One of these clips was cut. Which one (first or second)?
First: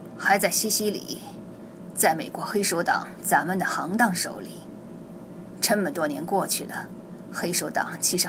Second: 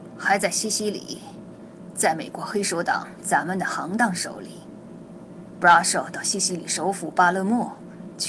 first